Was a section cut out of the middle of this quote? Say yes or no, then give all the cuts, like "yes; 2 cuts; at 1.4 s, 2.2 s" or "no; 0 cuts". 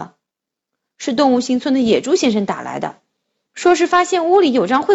no; 0 cuts